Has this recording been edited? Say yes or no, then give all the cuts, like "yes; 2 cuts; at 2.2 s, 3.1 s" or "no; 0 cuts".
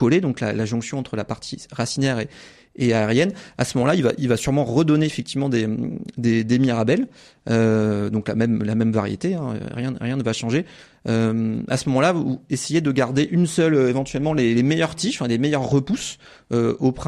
no; 0 cuts